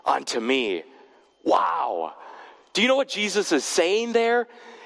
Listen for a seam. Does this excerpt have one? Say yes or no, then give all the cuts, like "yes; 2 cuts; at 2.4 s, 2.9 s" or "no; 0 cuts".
no; 0 cuts